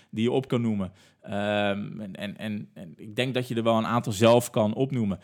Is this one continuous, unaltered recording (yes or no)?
yes